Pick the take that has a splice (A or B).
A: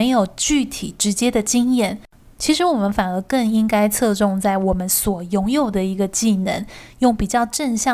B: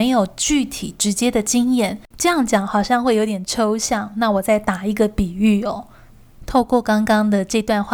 B